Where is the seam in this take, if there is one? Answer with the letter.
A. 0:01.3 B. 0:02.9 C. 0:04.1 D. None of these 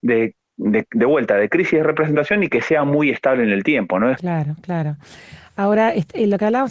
C